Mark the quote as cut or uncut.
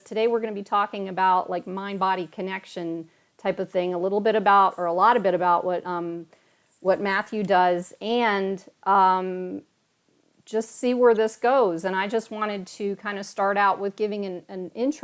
uncut